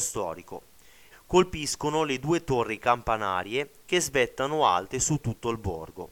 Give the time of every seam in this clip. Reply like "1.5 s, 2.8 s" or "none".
1.1 s